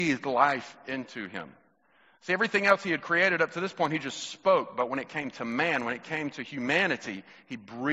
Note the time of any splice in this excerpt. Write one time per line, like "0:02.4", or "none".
none